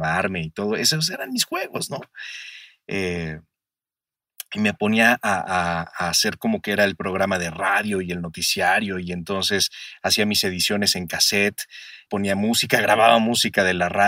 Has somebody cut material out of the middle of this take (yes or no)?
yes